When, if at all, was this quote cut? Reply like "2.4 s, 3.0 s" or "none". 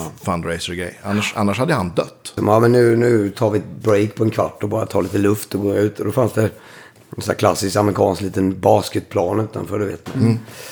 2.4 s

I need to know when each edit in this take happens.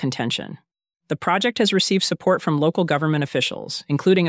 0.9 s

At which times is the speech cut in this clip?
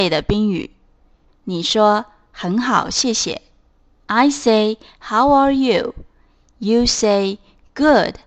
1.3 s

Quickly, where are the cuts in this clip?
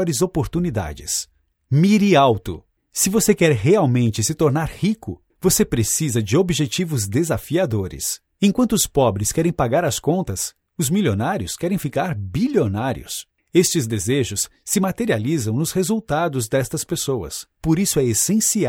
none

